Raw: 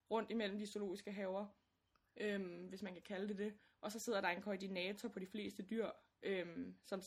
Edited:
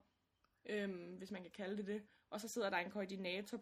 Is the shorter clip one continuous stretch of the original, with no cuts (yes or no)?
yes